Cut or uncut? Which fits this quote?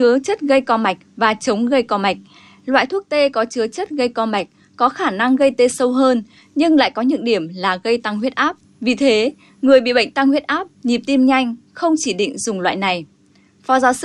uncut